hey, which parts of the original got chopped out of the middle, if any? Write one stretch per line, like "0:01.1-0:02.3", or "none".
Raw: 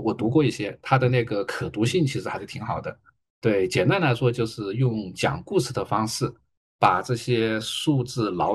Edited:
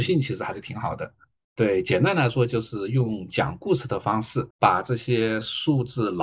0:06.4-0:06.7